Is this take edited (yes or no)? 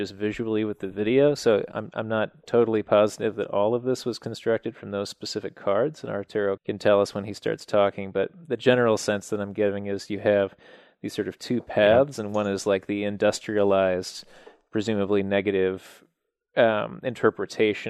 yes